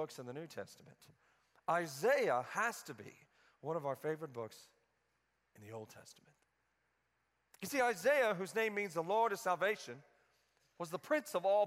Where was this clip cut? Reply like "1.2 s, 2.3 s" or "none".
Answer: none